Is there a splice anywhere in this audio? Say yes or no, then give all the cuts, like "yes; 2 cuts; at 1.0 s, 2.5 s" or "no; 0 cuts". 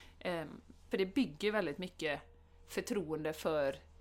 yes; 1 cut; at 0.9 s